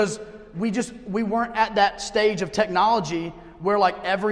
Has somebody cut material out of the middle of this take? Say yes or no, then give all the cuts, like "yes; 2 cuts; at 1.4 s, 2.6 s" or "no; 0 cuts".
no; 0 cuts